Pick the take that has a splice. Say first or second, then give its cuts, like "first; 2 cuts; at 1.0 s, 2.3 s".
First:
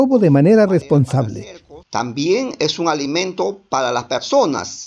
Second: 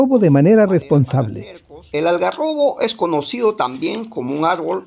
first; 1 cut; at 1.8 s